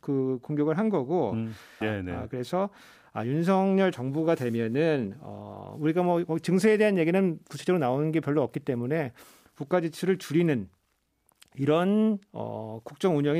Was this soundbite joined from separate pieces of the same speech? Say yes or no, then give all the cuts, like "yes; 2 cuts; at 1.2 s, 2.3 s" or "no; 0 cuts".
yes; 1 cut; at 1.8 s